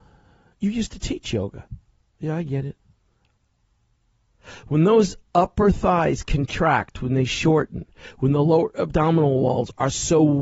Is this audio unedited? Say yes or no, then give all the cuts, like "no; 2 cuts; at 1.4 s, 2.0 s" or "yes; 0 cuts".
yes; 0 cuts